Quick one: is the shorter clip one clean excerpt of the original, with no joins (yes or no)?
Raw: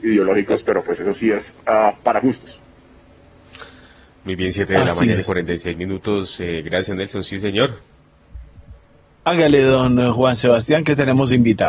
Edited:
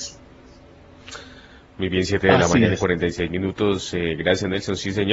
yes